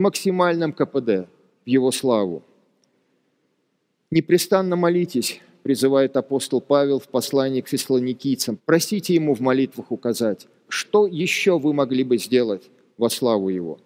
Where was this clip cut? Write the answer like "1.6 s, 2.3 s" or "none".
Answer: 8.6 s, 10.7 s